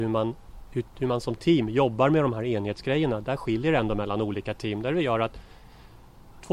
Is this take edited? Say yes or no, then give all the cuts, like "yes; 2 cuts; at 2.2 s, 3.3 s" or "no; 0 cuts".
no; 0 cuts